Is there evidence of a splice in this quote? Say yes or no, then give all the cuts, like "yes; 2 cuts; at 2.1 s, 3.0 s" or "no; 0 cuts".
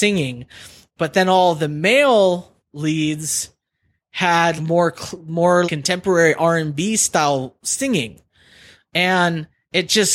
yes; 2 cuts; at 4.6 s, 5.6 s